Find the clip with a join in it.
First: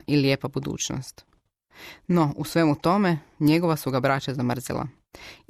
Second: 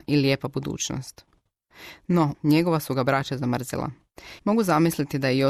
second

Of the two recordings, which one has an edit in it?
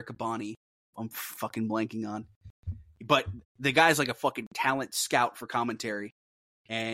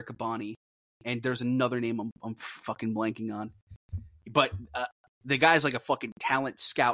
first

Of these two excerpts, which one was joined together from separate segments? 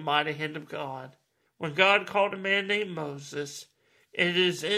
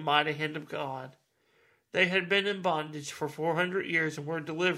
first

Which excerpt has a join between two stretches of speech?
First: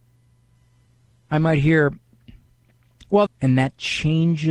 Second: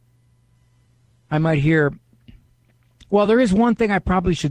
first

